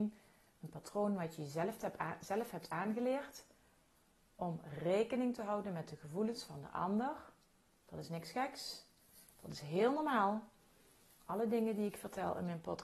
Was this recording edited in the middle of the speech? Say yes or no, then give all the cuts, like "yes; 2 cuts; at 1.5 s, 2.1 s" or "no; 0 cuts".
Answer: yes; 1 cut; at 7.8 s